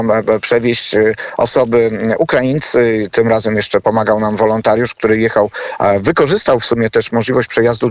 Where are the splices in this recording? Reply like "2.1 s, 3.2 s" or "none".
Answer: 3.1 s